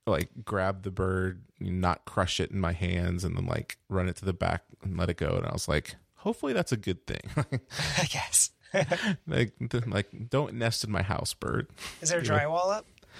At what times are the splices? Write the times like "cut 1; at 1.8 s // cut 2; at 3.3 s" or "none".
none